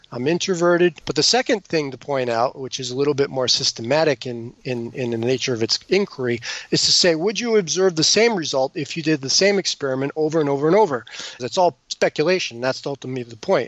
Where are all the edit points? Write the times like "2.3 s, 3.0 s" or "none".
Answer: 1.0 s, 11.4 s